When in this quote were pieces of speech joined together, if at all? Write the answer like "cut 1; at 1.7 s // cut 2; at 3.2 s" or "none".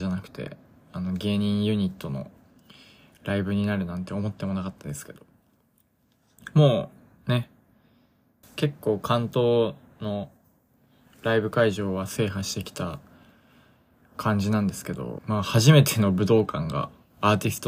cut 1; at 8.4 s // cut 2; at 15.2 s